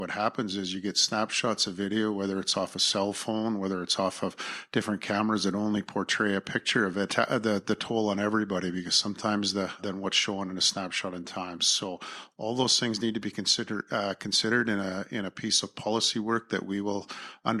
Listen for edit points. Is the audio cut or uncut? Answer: cut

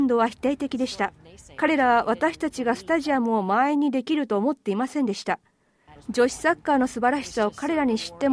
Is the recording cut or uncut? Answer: cut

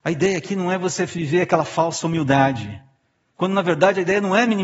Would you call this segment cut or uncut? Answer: cut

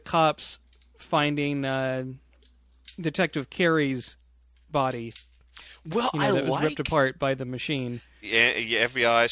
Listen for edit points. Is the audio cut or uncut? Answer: cut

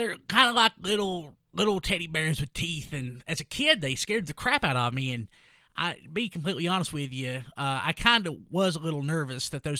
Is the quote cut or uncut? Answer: uncut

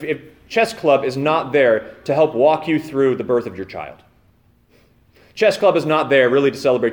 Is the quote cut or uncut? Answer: uncut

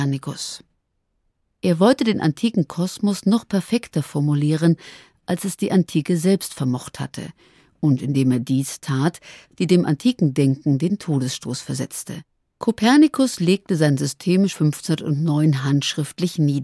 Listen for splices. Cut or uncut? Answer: cut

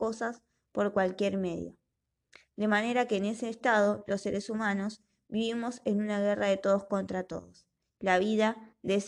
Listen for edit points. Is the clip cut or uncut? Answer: uncut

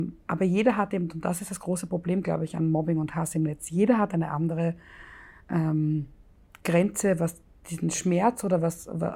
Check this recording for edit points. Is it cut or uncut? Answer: uncut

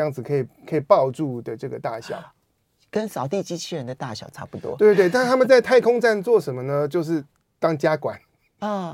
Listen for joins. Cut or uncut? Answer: uncut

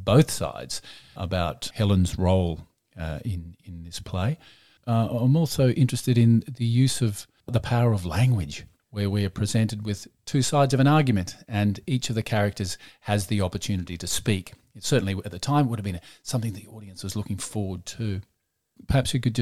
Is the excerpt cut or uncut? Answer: uncut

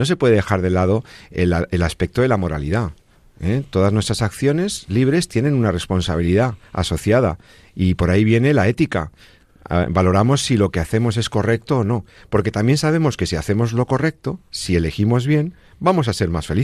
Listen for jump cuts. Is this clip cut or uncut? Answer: uncut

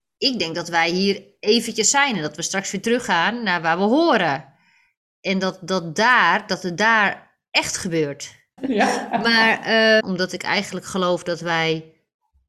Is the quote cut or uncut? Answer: cut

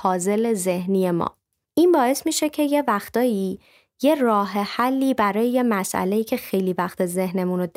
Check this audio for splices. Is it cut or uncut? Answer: uncut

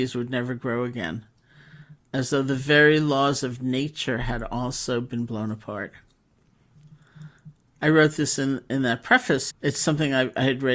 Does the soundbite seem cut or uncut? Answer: cut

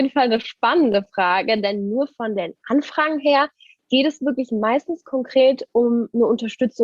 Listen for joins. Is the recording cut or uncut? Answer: uncut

